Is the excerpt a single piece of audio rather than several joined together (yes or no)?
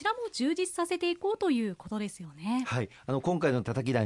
yes